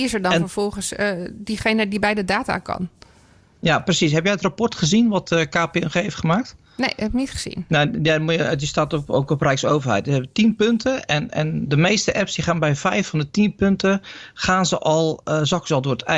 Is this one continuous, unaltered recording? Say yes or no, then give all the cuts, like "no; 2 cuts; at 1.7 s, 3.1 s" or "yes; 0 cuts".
yes; 0 cuts